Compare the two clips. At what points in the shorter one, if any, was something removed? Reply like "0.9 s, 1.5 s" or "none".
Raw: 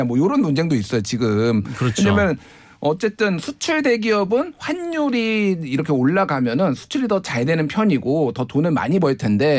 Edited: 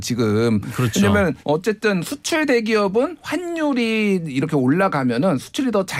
1.4 s